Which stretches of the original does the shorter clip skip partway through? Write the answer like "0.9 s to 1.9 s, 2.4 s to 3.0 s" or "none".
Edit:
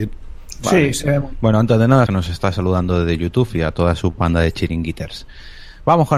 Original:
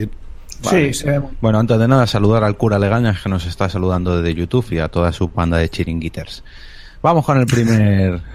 2.1 s to 3.2 s